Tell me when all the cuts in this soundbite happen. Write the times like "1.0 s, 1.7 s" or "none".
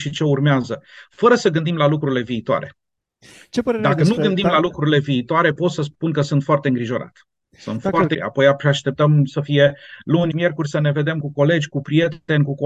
8.1 s, 10.3 s